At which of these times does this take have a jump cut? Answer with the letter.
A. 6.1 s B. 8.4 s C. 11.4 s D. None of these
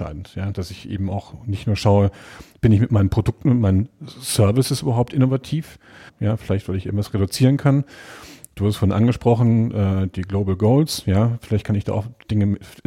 A